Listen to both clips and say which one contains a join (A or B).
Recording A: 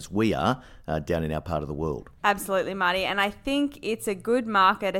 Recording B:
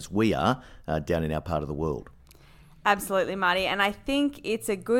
A